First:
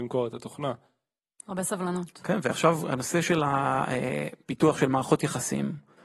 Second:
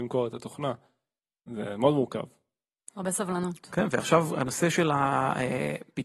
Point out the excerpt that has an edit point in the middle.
first; 1 cut; at 1.3 s

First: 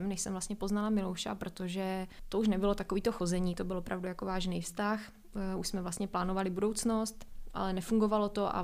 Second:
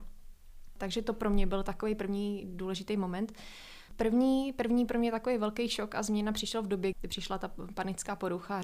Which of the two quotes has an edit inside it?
second; 2 cuts; at 3.9 s, 6.9 s

